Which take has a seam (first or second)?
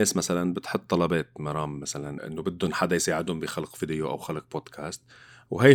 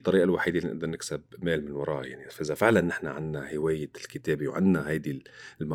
first